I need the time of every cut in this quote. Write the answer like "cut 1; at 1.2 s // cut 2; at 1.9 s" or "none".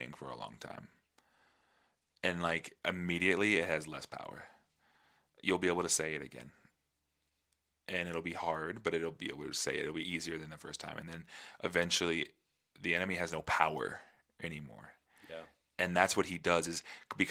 none